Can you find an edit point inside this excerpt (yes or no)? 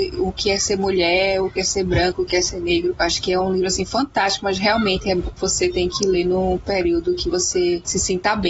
no